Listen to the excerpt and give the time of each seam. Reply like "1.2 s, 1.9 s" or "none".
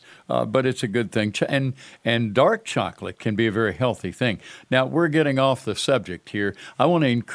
none